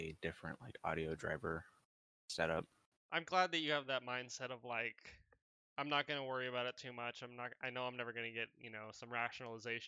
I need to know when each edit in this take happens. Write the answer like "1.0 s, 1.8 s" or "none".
2.9 s